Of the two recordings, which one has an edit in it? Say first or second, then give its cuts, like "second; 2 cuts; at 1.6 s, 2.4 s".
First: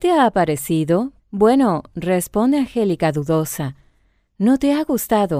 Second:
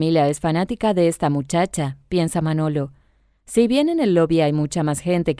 first; 1 cut; at 1.2 s